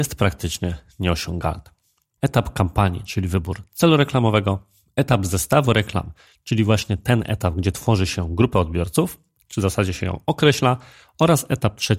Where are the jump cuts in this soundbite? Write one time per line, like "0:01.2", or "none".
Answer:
0:02.2

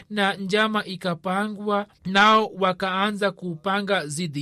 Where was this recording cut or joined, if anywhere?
0:01.9

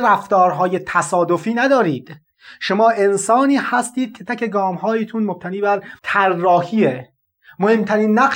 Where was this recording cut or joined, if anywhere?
0:04.3
0:06.0

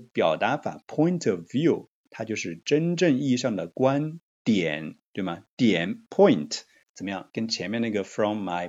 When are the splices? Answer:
0:06.8

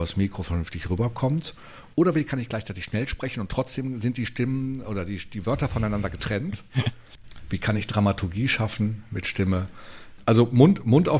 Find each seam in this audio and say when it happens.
0:10.2

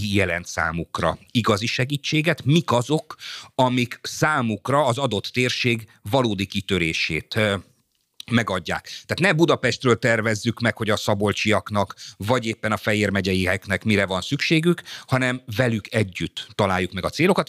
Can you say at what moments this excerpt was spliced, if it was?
none

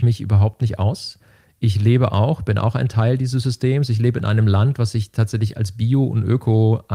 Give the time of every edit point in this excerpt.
none

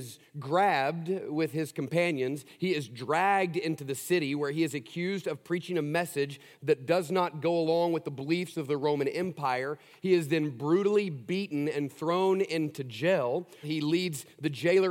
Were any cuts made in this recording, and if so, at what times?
0:13.6

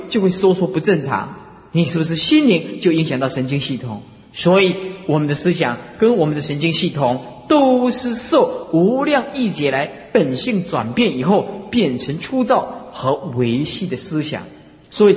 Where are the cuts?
none

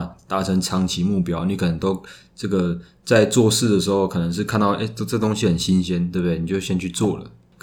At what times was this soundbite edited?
none

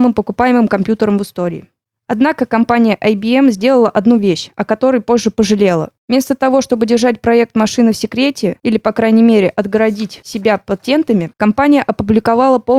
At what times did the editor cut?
0:11.3

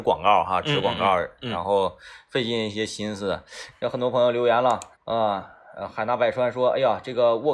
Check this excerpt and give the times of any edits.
0:03.7
0:04.9

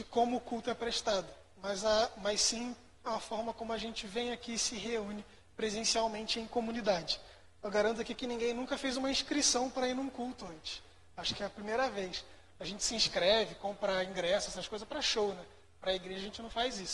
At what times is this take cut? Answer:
none

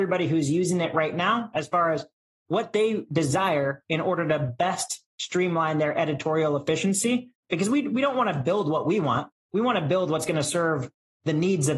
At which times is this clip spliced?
none

